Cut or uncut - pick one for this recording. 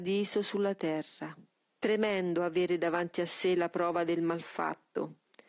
cut